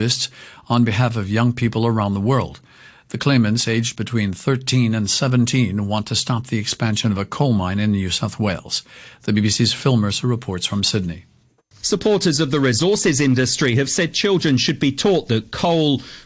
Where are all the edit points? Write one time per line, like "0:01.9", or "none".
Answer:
0:11.8